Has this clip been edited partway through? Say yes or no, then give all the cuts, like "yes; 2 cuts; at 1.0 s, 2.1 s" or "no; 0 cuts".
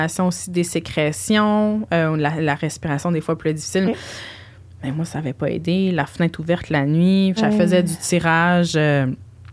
yes; 2 cuts; at 3.9 s, 7.4 s